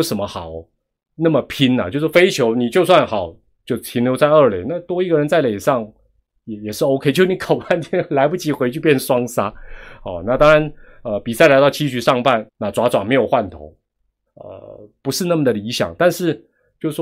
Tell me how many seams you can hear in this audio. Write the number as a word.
two